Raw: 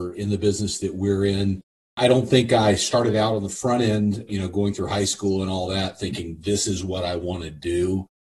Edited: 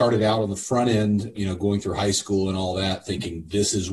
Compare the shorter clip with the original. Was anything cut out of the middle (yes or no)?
no